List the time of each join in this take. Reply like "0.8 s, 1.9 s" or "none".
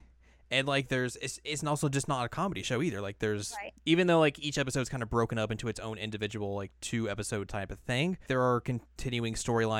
3.8 s, 8.3 s